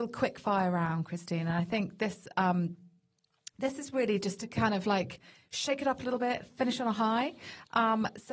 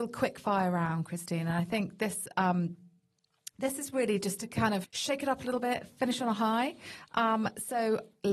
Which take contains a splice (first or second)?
second